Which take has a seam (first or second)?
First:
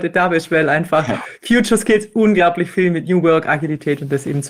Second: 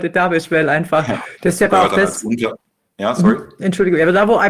second